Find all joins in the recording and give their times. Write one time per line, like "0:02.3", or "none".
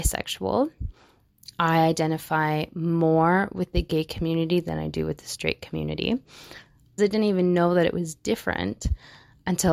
0:07.0